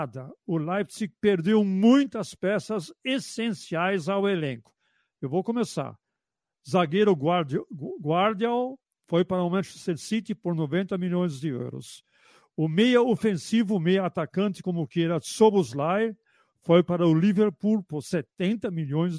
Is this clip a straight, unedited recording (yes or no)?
yes